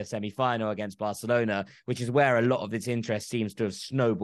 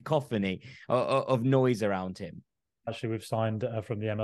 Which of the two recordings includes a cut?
second; 1 cut; at 2.9 s

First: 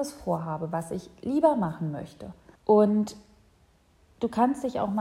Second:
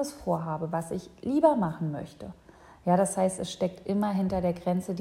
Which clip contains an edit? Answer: first; 1 cut; at 2.5 s

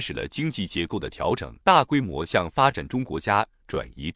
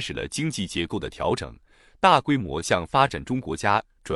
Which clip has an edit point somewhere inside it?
first; 1 cut; at 1.6 s

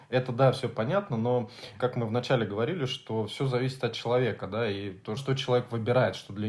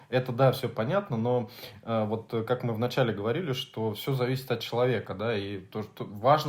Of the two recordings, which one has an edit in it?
first; 2 cuts; at 1.8 s, 5.2 s

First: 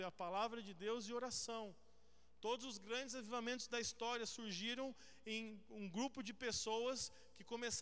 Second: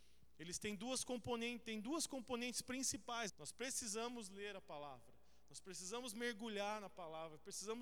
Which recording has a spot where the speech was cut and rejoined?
second; 1 cut; at 3.3 s

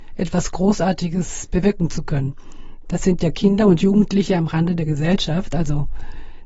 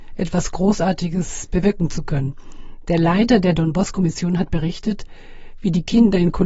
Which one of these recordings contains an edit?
first; 1 cut; at 2.9 s

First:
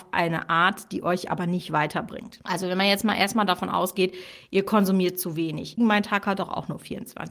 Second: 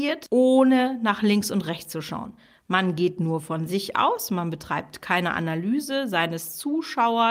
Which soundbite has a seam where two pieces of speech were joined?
first; 1 cut; at 5.8 s

